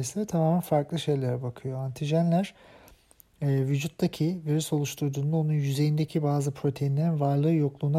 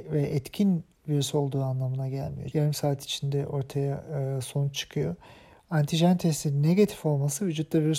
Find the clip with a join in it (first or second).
second